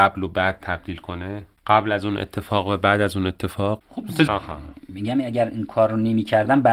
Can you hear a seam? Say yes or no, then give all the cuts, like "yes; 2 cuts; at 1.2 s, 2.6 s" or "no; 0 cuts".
yes; 1 cut; at 4.3 s